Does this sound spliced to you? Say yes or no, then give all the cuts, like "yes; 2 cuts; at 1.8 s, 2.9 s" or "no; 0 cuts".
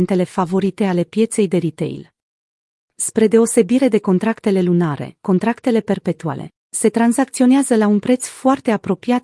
yes; 1 cut; at 6.6 s